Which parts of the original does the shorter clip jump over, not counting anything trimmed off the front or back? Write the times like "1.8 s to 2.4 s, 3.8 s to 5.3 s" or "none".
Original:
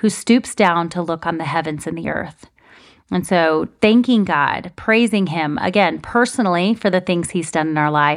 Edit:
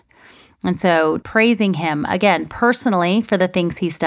3.7 s to 4.7 s